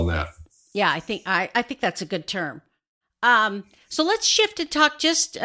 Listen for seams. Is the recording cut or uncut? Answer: uncut